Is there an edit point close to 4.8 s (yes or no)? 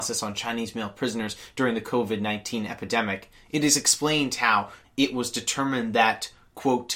yes